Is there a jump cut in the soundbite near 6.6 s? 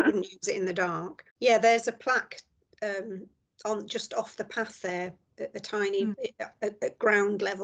no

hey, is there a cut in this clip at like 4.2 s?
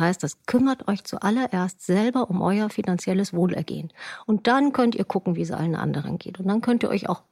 no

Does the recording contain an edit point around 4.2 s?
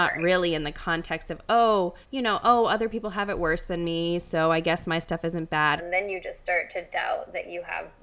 no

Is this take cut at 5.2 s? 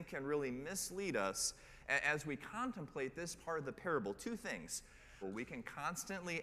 yes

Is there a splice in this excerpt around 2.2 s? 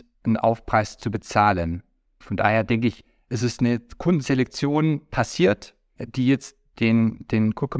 yes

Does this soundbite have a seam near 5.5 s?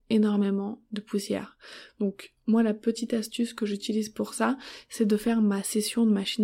no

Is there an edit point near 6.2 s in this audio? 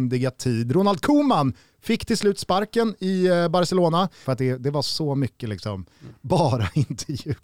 no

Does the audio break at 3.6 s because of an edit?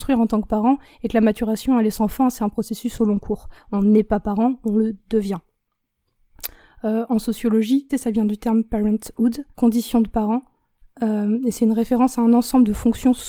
no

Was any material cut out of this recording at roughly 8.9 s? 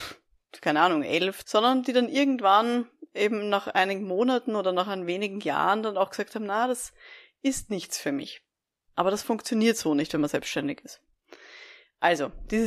yes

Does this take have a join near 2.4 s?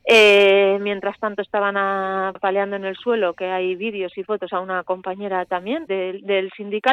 yes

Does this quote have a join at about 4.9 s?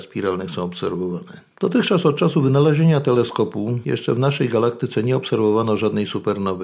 no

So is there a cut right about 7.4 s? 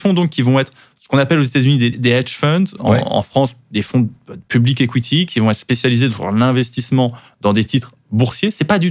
no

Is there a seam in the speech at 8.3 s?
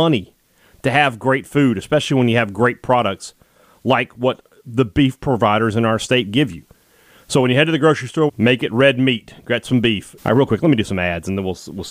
yes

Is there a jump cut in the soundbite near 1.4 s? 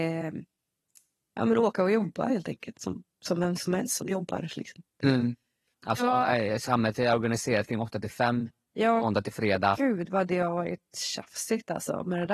no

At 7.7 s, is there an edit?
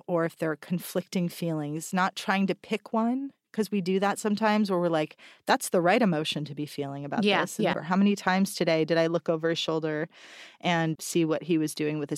yes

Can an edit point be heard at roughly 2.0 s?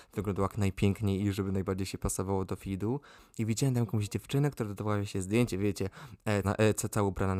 no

